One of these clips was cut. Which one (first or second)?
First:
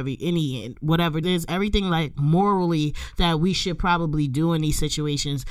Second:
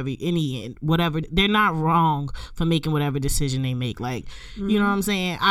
first